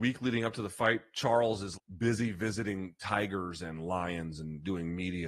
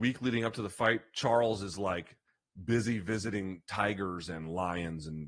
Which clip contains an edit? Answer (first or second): first